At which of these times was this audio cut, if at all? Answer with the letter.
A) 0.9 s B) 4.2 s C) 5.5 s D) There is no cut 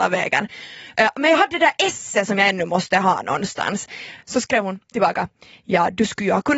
D